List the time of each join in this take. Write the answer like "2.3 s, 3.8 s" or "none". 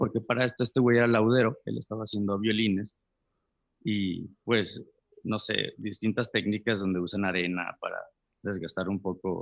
none